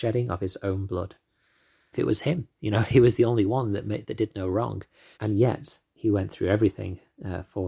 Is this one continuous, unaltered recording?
no; 2 cuts; at 1.9 s, 5.1 s

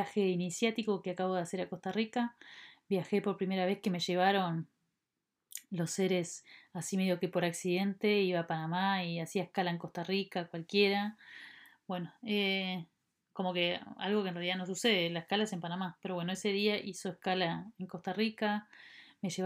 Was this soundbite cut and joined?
yes; 1 cut; at 2.7 s

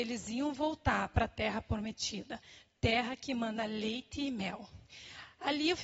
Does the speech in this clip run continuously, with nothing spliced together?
yes; 0 cuts

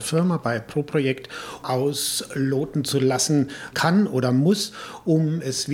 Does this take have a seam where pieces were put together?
yes; 2 cuts; at 1.6 s, 3.7 s

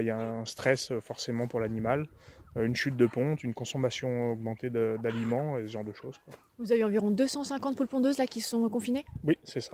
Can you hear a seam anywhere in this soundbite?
no; 0 cuts

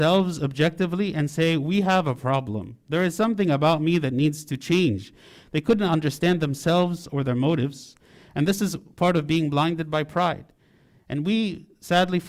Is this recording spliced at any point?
no; 0 cuts

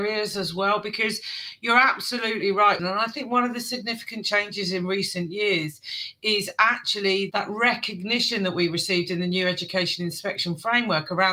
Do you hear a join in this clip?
yes; 1 cut; at 2.8 s

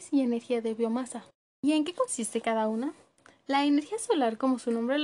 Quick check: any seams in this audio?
no; 0 cuts

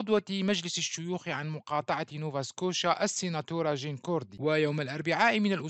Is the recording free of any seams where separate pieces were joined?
yes; 0 cuts

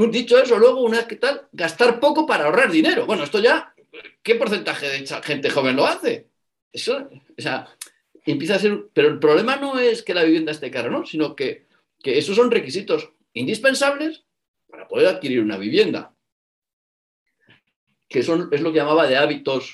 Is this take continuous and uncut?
no; 1 cut; at 6.7 s

